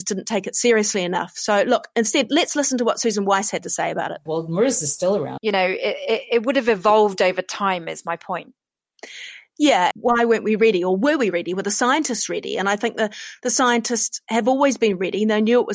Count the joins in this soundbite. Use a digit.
3